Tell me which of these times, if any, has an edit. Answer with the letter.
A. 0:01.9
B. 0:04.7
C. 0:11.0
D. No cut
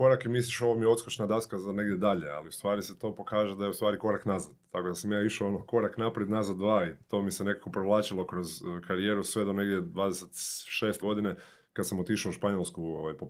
C